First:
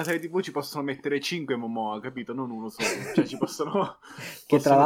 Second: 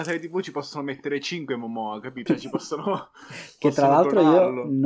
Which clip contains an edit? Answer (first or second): second